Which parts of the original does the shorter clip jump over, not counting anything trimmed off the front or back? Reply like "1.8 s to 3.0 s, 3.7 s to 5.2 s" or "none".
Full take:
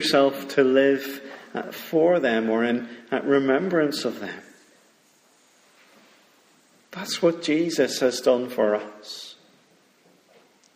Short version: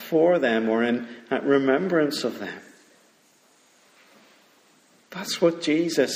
none